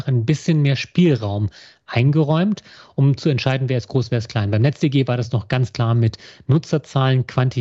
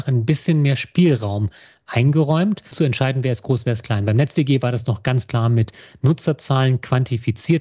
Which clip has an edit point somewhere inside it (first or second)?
second